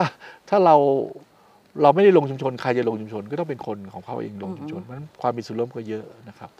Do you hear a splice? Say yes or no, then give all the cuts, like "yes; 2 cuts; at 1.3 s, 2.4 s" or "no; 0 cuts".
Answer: no; 0 cuts